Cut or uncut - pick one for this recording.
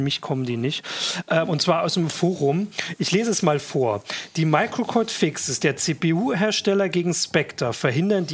uncut